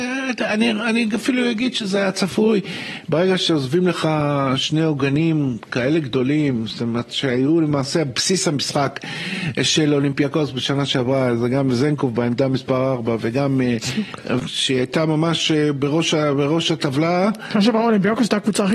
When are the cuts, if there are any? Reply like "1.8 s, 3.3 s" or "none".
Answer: 14.4 s